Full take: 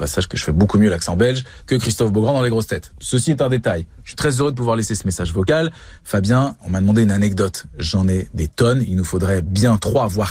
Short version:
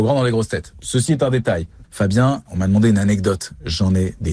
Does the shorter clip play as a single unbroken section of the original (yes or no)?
no